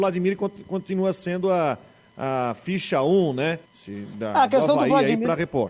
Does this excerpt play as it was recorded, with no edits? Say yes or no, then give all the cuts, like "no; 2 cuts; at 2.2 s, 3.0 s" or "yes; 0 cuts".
no; 1 cut; at 3.6 s